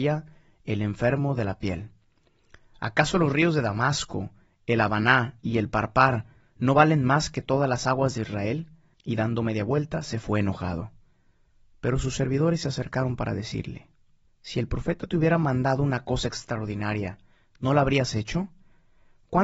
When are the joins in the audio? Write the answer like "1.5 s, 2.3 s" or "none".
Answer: 8.9 s, 14.3 s